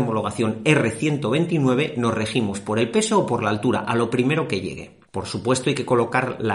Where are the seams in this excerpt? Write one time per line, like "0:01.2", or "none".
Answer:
0:05.1